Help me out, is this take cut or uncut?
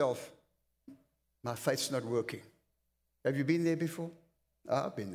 uncut